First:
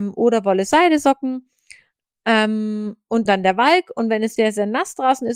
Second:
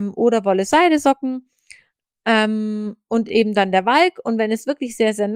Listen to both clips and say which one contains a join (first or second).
first